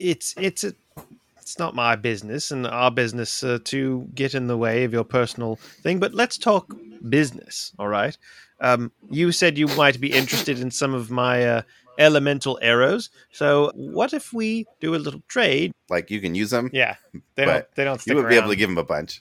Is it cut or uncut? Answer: cut